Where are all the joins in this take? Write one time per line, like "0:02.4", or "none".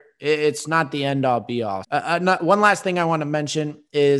0:01.8